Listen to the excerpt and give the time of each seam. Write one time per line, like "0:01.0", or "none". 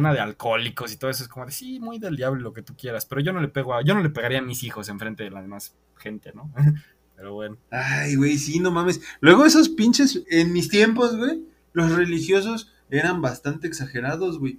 0:07.6
0:10.2